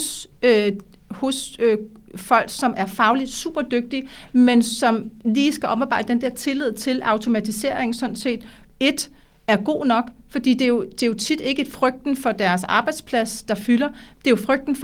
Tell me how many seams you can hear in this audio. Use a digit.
0